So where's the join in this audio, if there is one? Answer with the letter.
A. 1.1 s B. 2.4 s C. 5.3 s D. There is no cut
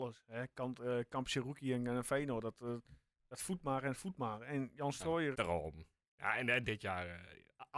C